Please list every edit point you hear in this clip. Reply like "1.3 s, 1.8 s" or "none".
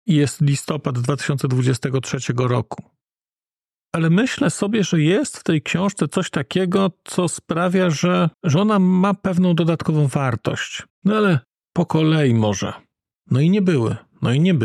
8.3 s, 10.9 s, 13.1 s